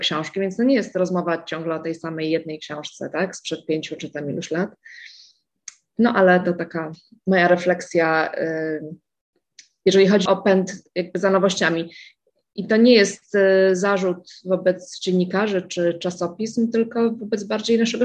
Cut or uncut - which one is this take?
cut